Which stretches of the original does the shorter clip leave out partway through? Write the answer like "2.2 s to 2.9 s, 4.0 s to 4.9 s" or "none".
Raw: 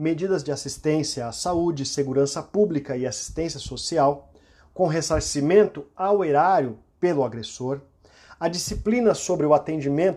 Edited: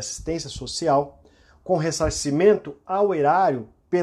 none